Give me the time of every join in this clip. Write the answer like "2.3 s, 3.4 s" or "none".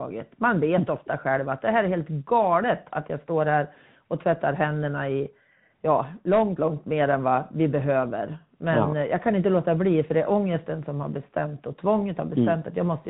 6.6 s